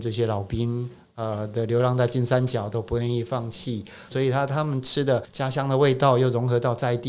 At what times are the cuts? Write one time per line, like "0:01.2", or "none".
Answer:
0:04.1

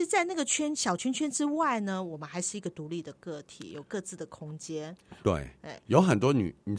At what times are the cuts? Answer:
none

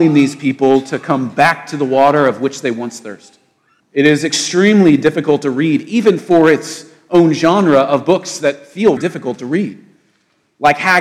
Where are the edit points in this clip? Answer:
0:03.8
0:09.0

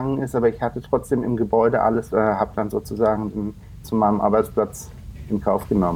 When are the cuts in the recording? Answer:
0:02.1
0:03.8

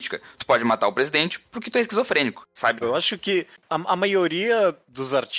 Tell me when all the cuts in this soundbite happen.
0:02.8

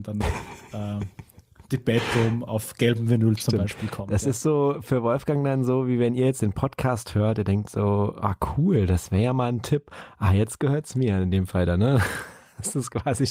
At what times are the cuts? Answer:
none

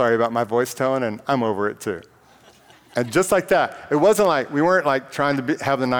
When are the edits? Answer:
none

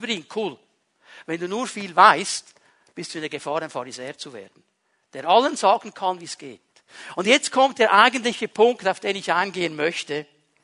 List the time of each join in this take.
none

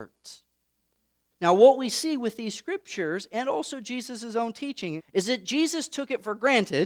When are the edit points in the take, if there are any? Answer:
0:01.3
0:05.0

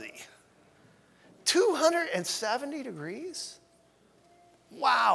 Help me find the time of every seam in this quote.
none

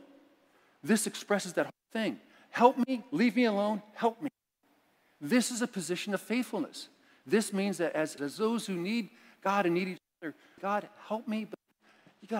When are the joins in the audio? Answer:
0:08.2
0:10.6

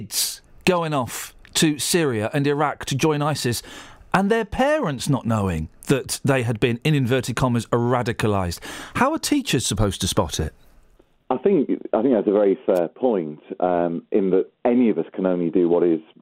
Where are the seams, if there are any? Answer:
none

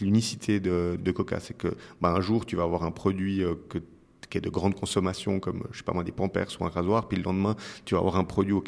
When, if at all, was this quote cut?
0:01.0

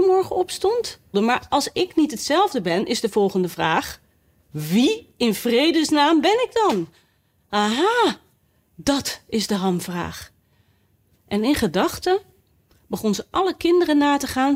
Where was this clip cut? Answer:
0:01.1

